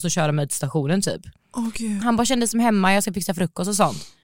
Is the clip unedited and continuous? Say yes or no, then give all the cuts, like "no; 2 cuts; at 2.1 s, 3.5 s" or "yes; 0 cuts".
no; 1 cut; at 2.0 s